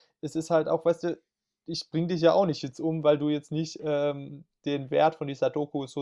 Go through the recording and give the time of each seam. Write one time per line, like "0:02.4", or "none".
none

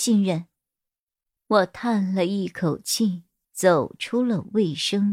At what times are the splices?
0:01.4
0:03.4

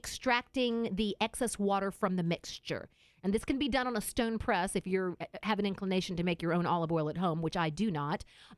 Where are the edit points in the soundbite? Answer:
none

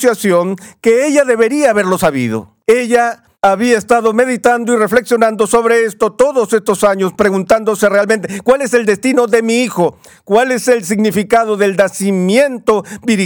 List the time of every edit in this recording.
none

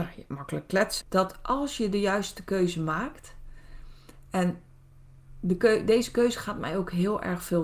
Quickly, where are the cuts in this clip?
0:01.0

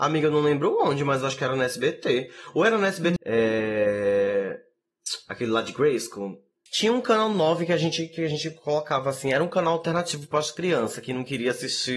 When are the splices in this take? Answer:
0:03.2
0:06.7

